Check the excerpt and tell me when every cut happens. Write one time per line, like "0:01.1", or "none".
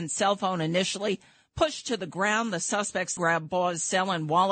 0:03.2